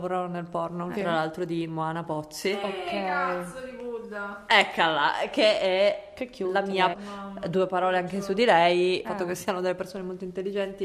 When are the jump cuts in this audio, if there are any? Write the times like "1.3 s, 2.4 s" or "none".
0.9 s, 6.9 s, 9.0 s

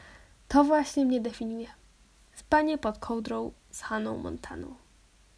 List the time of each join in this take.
none

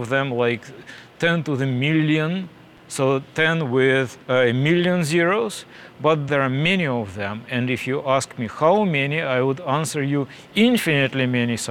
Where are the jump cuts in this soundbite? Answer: 4.2 s, 6.3 s

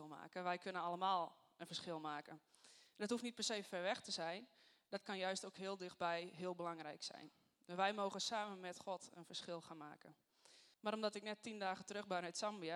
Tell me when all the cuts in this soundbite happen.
10.7 s

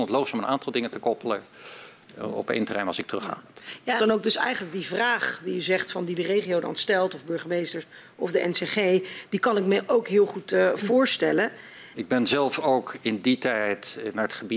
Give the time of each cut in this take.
4.0 s, 11.9 s

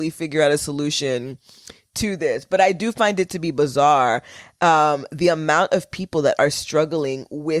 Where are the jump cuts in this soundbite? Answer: none

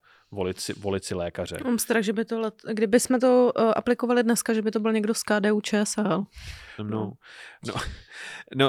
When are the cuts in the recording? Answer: 6.8 s

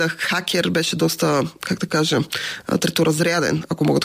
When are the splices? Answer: none

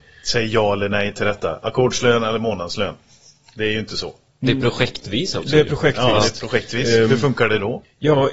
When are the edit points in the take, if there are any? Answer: none

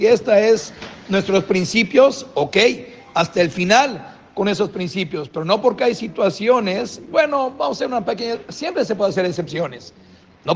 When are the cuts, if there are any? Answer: none

